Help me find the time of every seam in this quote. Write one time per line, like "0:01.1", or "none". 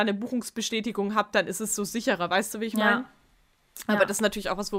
none